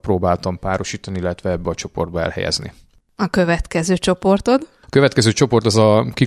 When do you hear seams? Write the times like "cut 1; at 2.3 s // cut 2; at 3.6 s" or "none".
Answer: none